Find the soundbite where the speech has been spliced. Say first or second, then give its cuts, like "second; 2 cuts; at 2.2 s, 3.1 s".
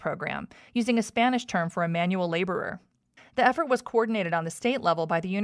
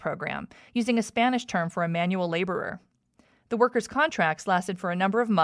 first; 1 cut; at 3.2 s